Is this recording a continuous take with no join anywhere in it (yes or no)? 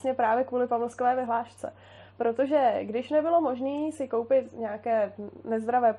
yes